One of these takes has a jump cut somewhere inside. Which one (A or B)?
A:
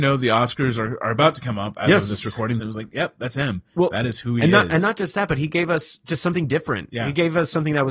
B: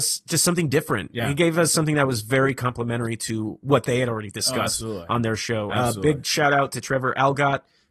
A